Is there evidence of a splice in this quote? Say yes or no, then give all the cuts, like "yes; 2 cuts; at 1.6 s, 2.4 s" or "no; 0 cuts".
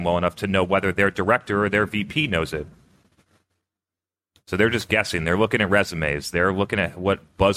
no; 0 cuts